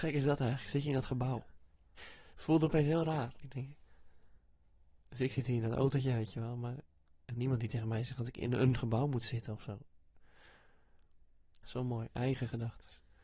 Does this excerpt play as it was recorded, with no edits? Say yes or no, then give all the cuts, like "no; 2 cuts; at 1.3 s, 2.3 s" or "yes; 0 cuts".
no; 2 cuts; at 2.0 s, 11.6 s